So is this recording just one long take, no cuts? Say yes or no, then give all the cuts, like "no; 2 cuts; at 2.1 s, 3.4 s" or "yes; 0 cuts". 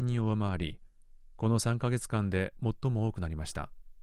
yes; 0 cuts